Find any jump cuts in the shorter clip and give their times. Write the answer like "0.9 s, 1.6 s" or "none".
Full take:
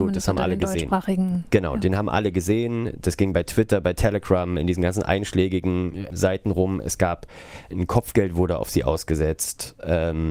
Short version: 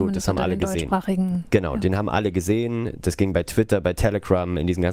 none